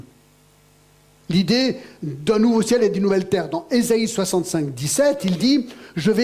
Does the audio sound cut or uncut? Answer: cut